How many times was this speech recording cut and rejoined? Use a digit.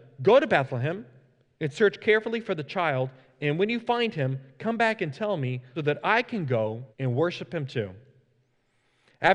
2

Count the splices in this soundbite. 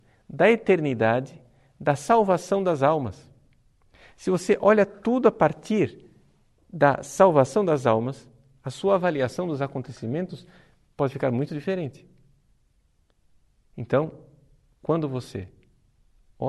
0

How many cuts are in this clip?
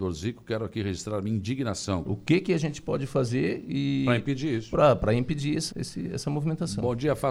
2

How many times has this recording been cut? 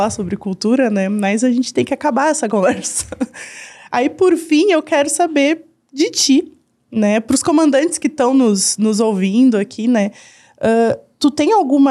0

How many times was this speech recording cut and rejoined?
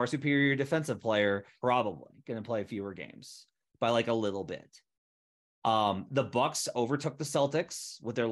1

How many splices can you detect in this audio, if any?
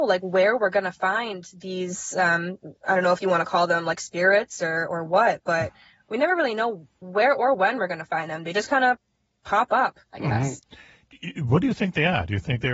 0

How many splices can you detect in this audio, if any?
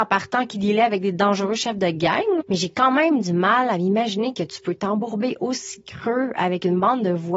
1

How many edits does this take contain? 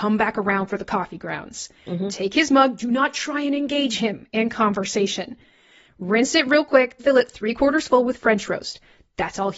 1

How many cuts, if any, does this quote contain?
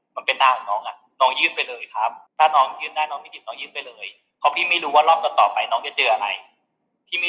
1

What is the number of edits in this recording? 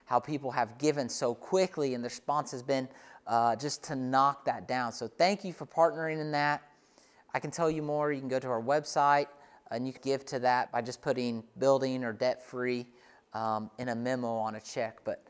1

